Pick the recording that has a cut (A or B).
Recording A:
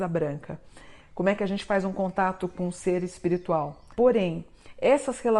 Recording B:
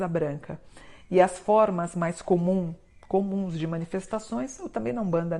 A